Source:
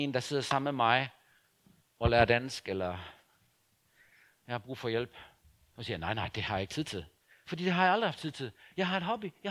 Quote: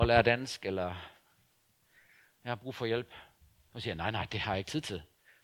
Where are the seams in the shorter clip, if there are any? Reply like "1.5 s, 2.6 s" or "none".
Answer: none